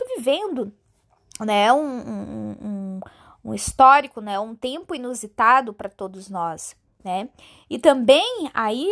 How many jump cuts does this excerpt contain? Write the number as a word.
zero